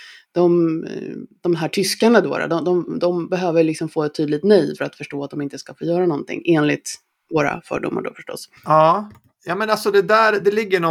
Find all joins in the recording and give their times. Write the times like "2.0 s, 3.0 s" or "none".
8.6 s